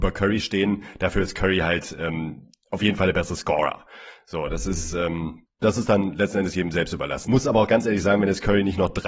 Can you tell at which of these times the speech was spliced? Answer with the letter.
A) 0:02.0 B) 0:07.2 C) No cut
B